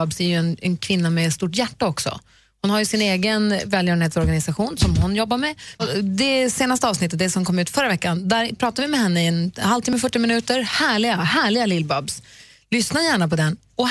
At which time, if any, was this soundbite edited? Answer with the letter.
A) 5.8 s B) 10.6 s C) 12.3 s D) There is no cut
A